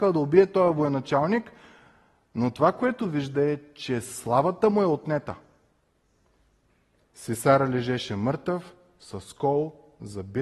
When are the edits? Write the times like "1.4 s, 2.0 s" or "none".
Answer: none